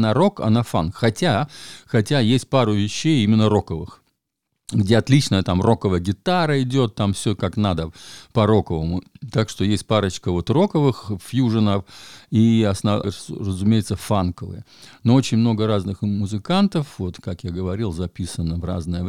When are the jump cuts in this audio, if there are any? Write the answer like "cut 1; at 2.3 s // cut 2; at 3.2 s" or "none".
cut 1; at 13.0 s